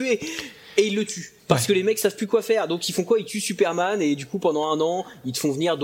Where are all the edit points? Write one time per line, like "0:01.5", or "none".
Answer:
0:01.4